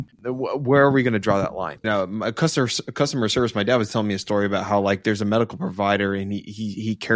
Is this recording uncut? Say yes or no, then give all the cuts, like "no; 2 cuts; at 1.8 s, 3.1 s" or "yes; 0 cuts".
no; 1 cut; at 1.8 s